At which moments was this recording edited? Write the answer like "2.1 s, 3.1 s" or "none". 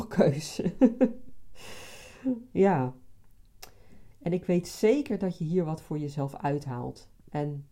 4.1 s